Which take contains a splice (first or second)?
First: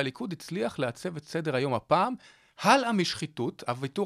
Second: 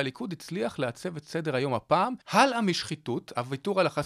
second